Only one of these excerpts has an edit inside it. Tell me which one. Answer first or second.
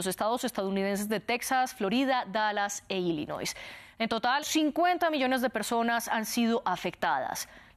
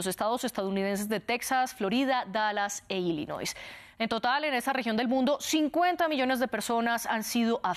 first